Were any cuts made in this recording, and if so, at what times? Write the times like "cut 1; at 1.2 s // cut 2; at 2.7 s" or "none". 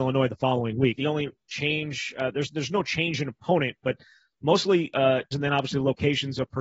cut 1; at 0.9 s // cut 2; at 5.3 s